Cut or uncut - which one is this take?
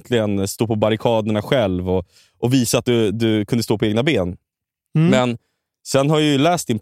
uncut